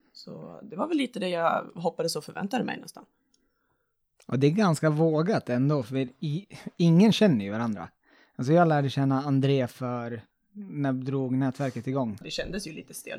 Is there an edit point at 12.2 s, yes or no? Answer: yes